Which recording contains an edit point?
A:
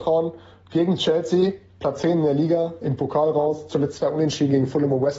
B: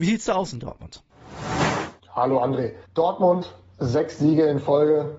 B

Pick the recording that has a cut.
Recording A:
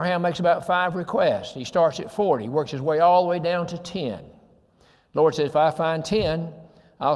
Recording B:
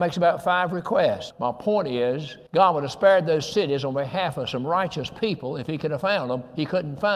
B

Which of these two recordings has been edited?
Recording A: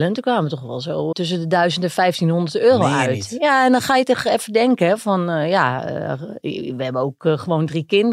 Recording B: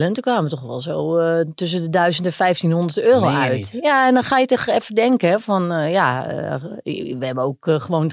A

